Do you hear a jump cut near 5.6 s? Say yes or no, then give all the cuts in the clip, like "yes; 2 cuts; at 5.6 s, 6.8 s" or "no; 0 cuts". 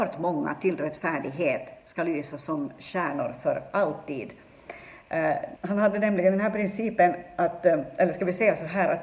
yes; 1 cut; at 5.6 s